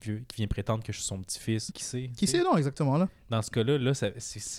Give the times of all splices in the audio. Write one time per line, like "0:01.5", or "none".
0:01.7